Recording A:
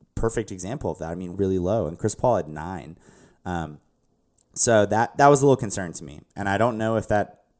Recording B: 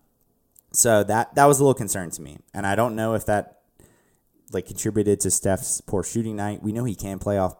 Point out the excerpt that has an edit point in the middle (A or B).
A